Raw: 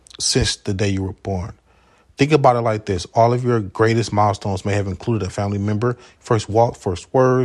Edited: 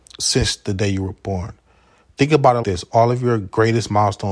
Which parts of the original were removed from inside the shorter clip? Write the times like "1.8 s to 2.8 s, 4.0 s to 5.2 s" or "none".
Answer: 2.6 s to 2.8 s